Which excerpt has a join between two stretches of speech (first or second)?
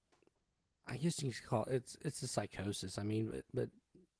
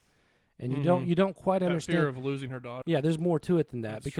second